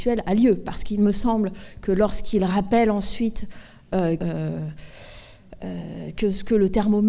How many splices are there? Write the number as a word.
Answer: one